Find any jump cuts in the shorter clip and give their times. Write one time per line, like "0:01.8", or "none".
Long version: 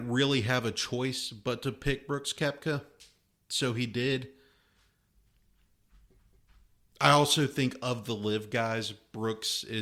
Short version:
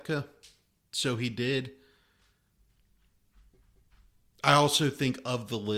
none